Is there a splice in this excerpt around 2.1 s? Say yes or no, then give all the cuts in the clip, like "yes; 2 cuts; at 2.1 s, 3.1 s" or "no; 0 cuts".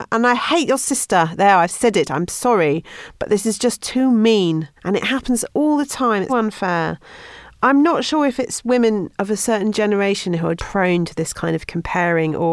no; 3 cuts; at 4.8 s, 6.3 s, 10.6 s